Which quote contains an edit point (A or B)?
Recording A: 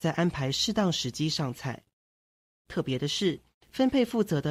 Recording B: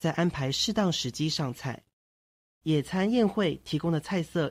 A